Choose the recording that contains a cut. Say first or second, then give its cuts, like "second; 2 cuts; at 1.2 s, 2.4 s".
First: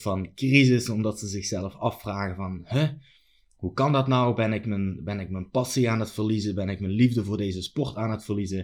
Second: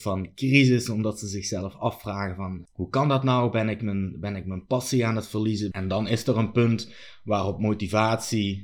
second; 2 cuts; at 2.6 s, 5.7 s